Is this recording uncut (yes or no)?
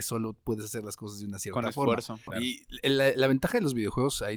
no